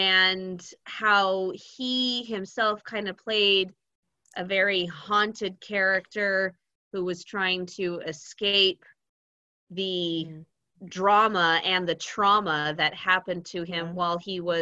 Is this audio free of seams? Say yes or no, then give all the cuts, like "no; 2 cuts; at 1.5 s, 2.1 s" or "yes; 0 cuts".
yes; 0 cuts